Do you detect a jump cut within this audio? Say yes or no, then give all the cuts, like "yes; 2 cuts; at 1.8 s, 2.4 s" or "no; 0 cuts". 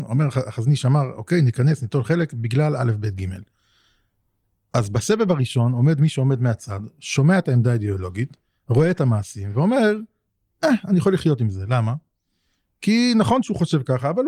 no; 0 cuts